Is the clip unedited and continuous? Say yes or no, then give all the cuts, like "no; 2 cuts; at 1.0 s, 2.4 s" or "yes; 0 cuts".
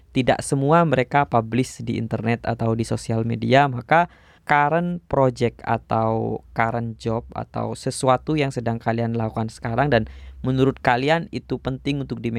no; 1 cut; at 4.4 s